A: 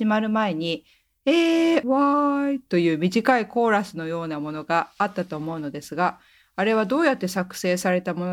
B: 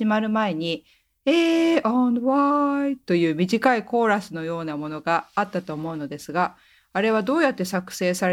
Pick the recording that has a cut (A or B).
A